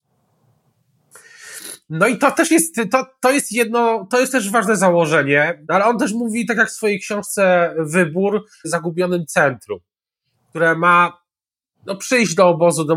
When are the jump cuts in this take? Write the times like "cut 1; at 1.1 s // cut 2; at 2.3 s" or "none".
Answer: cut 1; at 5.6 s // cut 2; at 8.6 s